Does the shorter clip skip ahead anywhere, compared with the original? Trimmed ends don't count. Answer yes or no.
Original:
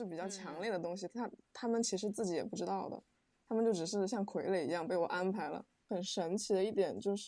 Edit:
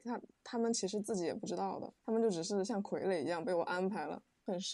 yes